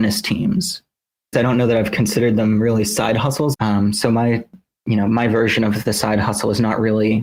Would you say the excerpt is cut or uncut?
cut